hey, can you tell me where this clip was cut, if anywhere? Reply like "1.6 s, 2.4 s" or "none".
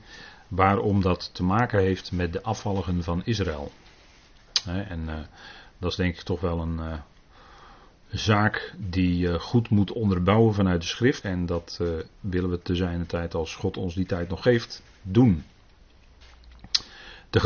11.2 s